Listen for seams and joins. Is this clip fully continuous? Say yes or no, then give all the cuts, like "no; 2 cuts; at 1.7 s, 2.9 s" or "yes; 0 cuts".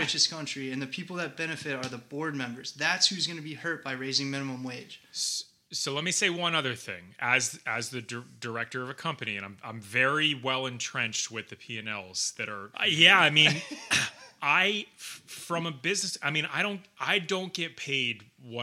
no; 1 cut; at 12.7 s